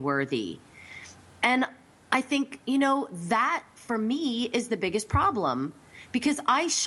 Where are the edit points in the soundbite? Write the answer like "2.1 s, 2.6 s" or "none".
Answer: none